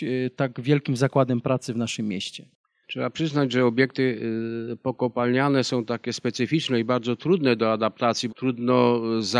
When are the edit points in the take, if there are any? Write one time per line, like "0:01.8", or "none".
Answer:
0:02.8
0:08.3

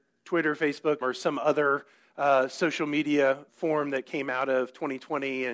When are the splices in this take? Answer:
0:01.0
0:03.5

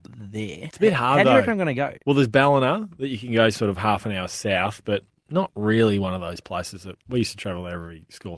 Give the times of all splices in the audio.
none

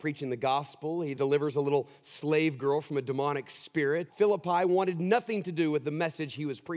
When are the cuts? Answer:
0:01.2
0:04.1

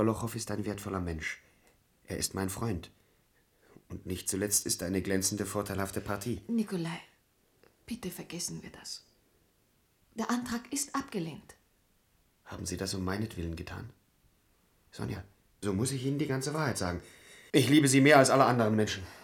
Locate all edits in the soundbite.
0:15.6
0:17.5

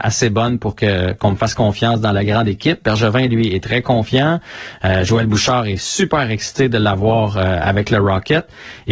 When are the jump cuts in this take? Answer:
none

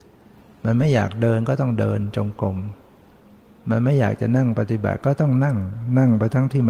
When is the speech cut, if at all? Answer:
none

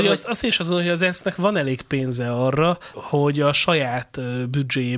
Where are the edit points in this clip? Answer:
0:02.9

